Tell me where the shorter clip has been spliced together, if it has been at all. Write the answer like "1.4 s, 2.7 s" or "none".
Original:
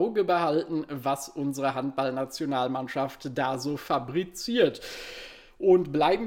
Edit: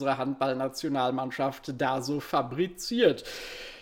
none